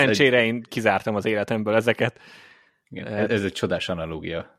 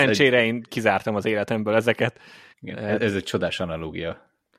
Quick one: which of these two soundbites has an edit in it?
second; 1 cut; at 2.5 s

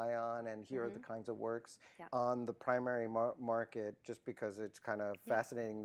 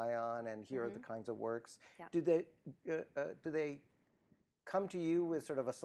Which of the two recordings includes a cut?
first; 1 cut; at 2.1 s

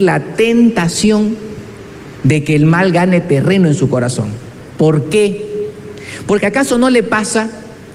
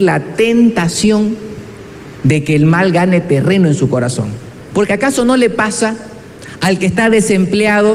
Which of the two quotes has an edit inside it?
second; 1 cut; at 4.7 s

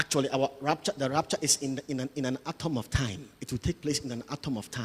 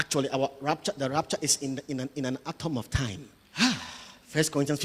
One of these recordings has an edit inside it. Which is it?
second; 1 cut; at 3.4 s

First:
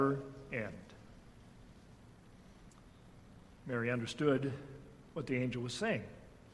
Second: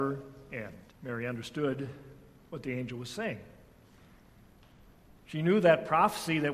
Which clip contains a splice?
second; 1 cut; at 0.9 s

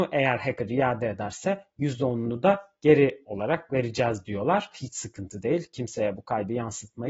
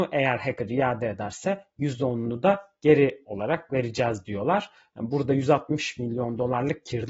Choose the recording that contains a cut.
first; 1 cut; at 4.7 s

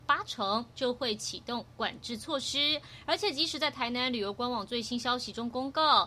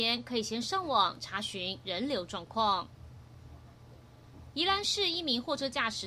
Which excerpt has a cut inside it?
second; 1 cut; at 4.5 s

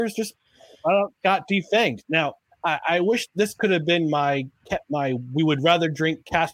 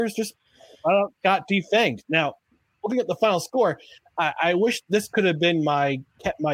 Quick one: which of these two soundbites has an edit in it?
first; 2 cuts; at 2.5 s, 4.8 s

